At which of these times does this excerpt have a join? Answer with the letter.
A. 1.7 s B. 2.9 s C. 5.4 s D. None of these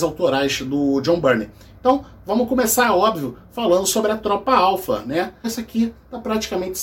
C